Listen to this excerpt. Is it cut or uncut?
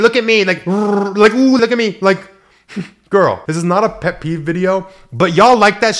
cut